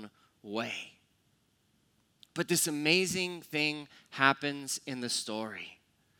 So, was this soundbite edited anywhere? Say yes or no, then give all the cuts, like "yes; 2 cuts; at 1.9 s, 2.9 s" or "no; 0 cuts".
yes; 1 cut; at 2.2 s